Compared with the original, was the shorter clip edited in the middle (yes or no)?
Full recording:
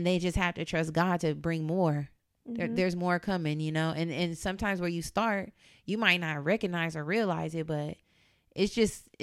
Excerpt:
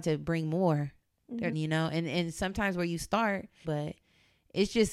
yes